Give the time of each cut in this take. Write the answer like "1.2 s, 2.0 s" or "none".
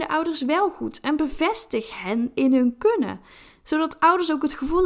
none